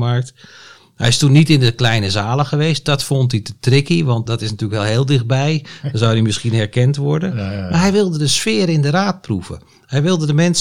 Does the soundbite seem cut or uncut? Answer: cut